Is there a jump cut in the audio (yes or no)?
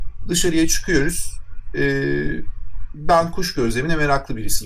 no